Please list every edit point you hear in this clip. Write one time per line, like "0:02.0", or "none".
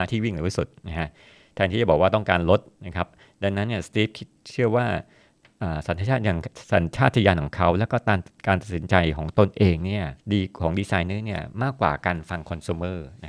0:10.2